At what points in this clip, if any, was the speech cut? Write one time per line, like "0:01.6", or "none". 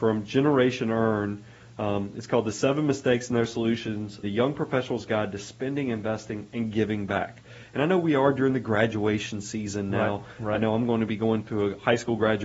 0:04.2